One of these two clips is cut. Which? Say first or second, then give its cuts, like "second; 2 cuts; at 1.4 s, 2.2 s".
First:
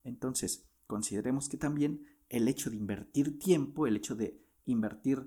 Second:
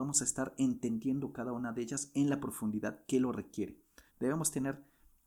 second; 1 cut; at 4.1 s